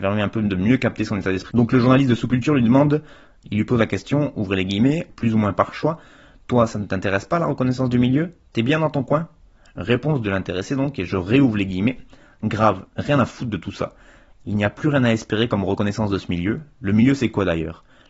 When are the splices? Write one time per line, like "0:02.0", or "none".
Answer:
0:01.5
0:05.1
0:12.9